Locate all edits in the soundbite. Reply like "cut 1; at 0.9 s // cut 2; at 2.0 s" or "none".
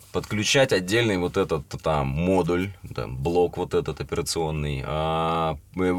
none